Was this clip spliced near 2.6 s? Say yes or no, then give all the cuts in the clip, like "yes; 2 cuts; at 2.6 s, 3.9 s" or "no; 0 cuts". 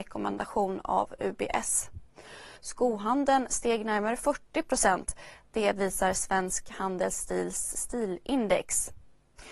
yes; 1 cut; at 2.6 s